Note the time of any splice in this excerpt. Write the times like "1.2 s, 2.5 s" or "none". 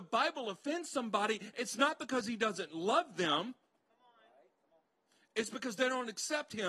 none